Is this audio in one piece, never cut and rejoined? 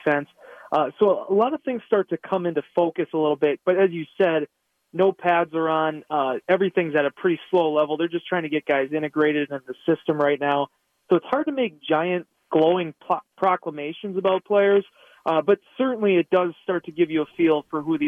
yes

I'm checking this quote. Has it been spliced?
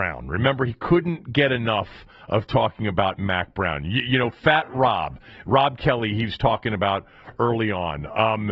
no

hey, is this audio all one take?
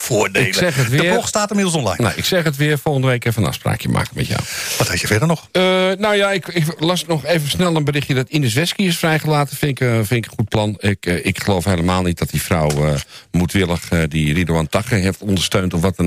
yes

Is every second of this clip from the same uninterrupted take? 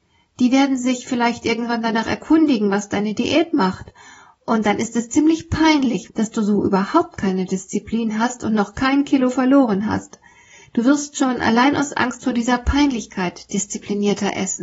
no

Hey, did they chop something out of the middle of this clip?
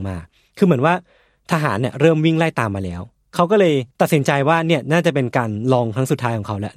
yes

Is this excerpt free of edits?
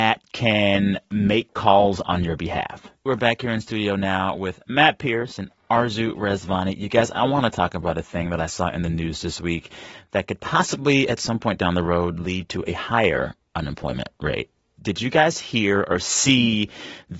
no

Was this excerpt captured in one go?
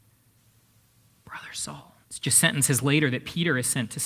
no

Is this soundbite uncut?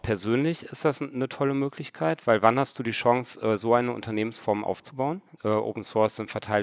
no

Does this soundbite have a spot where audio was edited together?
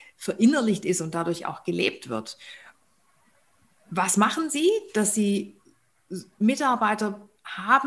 no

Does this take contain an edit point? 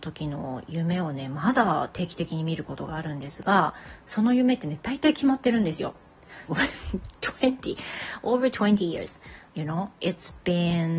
yes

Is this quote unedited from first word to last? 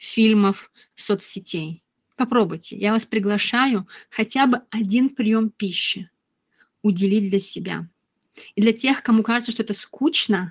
yes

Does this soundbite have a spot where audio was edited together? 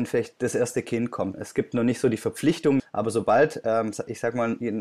yes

